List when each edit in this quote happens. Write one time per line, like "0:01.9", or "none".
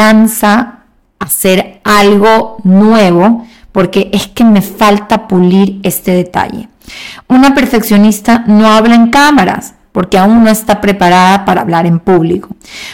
none